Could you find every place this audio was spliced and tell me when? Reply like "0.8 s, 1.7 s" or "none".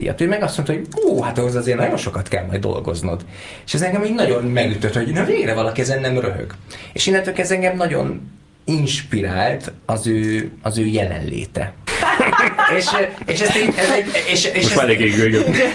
11.9 s